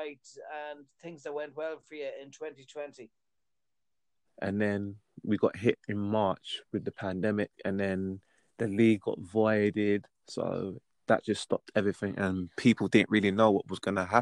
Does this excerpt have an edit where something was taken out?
yes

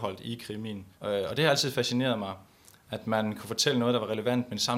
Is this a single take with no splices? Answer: no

